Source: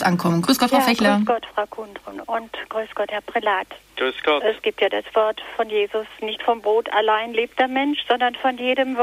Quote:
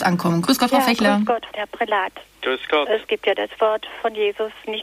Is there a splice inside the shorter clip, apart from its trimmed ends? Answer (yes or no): yes